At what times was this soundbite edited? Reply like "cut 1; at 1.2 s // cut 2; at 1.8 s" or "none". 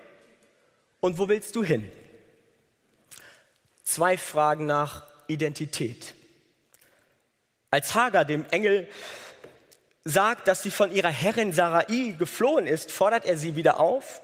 none